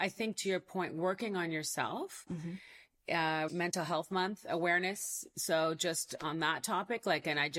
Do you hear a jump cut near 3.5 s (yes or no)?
yes